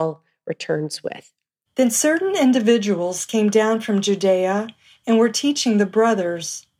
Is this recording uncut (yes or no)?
no